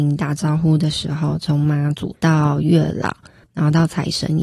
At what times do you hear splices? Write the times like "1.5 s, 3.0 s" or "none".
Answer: 2.1 s, 3.5 s